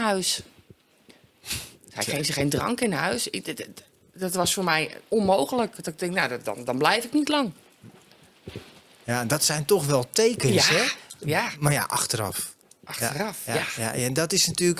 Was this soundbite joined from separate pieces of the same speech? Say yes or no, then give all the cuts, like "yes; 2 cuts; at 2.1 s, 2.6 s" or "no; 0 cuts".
no; 0 cuts